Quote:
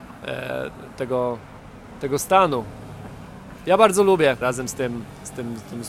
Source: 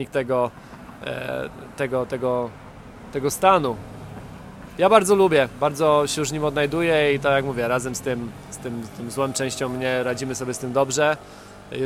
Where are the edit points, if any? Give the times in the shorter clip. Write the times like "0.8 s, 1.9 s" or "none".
1.0 s, 4.4 s